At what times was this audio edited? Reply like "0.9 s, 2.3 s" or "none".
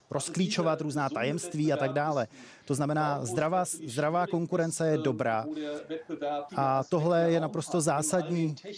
6.5 s

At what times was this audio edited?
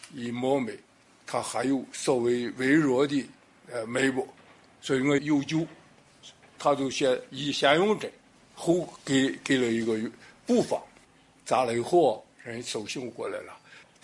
5.2 s

